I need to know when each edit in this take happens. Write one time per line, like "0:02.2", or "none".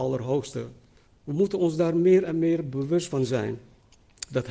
0:01.1